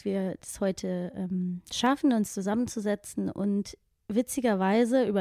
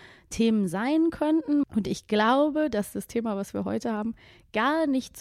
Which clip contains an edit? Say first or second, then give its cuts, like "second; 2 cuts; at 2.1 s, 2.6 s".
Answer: second; 1 cut; at 1.6 s